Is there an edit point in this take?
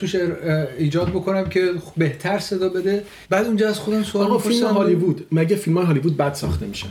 yes; 1 cut; at 3.2 s

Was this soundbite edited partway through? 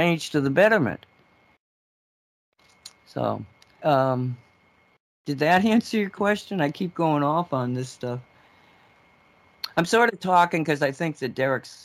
yes; 1 cut; at 3.8 s

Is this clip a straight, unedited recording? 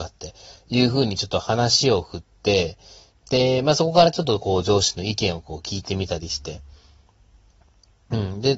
yes; 0 cuts

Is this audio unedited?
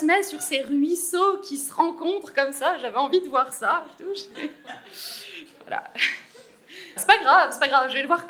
no; 1 cut; at 7.0 s

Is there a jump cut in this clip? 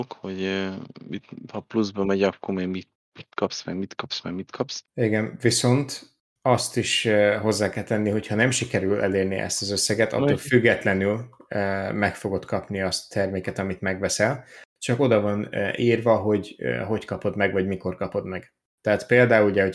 no; 0 cuts

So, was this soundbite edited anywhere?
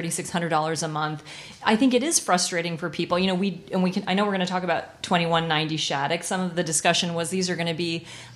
no; 0 cuts

